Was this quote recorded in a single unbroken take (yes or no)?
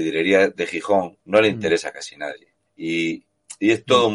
no